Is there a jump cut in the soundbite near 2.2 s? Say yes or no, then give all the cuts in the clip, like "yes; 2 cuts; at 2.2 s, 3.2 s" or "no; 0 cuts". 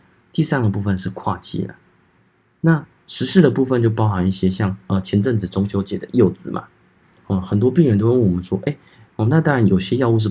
no; 1 cut; at 9.1 s